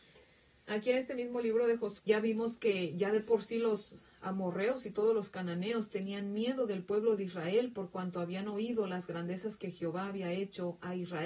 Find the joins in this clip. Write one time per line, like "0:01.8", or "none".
0:02.0